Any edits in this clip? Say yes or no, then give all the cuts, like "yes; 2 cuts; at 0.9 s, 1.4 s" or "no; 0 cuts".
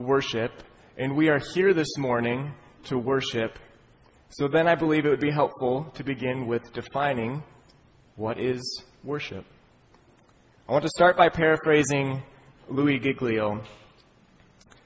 no; 0 cuts